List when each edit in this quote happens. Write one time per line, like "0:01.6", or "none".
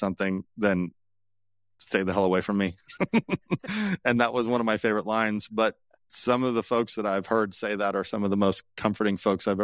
none